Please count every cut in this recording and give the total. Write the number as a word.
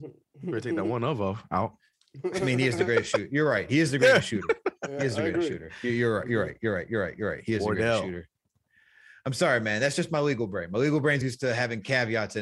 one